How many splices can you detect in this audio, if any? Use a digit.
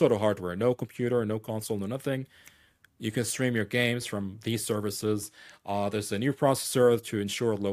0